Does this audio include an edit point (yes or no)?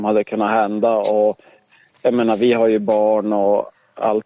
no